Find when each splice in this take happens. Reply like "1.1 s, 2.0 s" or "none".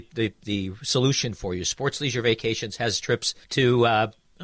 3.4 s